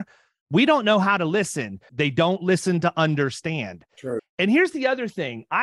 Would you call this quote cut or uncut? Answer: cut